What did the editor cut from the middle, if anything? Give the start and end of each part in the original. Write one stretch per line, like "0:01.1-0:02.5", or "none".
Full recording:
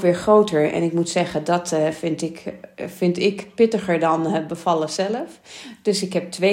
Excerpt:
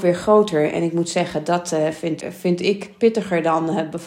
0:02.2-0:02.7